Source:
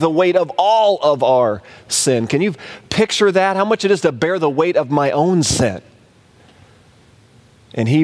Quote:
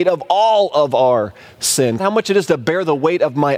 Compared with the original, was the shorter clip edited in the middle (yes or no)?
yes